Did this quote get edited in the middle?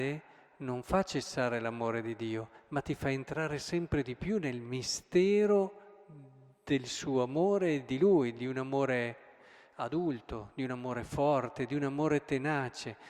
no; 0 cuts

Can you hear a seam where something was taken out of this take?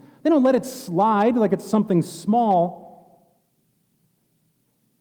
no; 0 cuts

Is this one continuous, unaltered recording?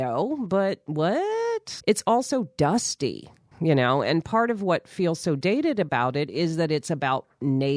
no; 2 cuts; at 1.8 s, 3.5 s

